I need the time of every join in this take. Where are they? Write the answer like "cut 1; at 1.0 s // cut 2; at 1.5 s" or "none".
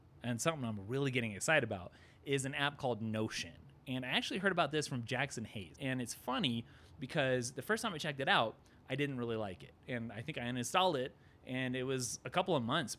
cut 1; at 5.7 s